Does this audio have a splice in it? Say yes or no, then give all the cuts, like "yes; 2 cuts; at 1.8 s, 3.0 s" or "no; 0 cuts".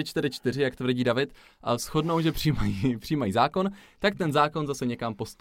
no; 0 cuts